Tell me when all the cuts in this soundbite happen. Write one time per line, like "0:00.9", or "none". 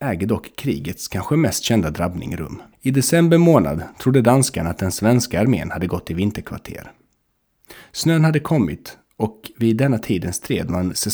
0:02.7

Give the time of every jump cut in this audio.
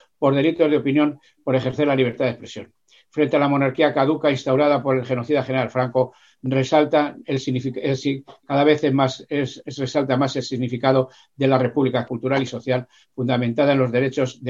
0:12.1

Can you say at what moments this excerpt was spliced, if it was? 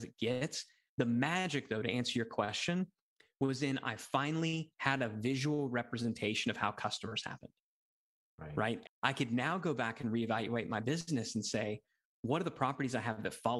0:08.8

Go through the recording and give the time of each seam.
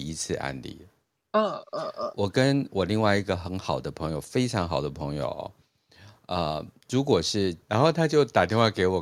0:07.6

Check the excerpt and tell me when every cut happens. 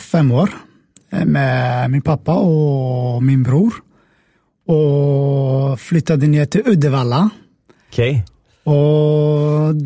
none

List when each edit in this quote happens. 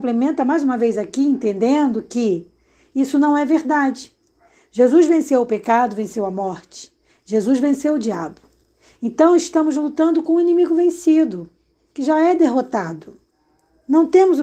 none

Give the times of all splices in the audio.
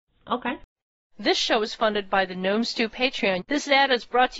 0:03.4

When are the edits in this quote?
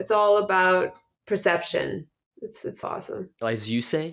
0:02.8

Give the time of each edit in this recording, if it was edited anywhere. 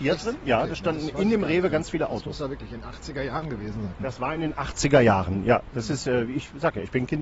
none

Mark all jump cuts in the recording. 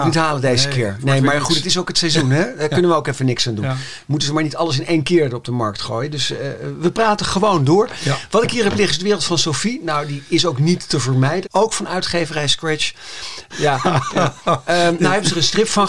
0:11.4
0:13.5

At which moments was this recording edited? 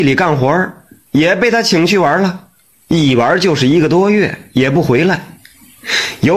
none

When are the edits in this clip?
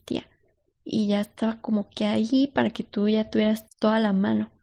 0:03.7

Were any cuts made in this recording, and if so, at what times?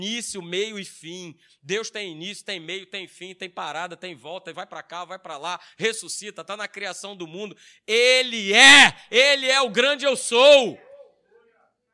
none

